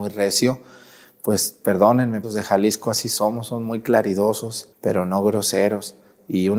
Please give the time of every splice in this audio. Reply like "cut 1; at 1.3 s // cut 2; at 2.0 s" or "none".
cut 1; at 2.2 s // cut 2; at 4.7 s